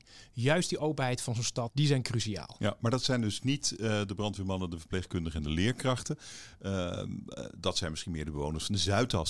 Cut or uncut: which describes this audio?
cut